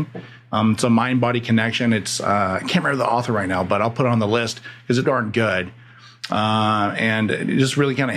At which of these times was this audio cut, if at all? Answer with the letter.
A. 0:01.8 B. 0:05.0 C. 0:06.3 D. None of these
B